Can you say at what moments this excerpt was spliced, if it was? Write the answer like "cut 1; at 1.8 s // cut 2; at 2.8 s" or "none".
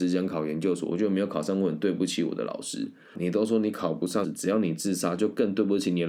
cut 1; at 3.1 s // cut 2; at 4.2 s